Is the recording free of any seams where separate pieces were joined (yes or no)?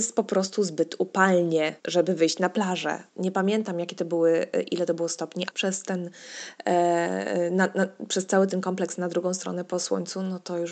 no